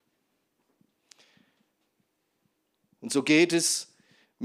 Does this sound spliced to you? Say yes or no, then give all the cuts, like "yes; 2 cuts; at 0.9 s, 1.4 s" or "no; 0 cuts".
no; 0 cuts